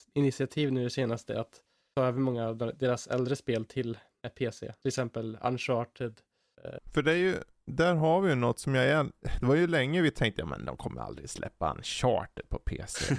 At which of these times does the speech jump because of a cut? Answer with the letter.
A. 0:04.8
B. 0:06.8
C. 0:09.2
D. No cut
B